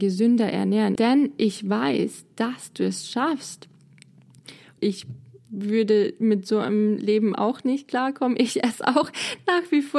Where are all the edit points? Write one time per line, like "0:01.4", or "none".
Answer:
0:01.0
0:04.8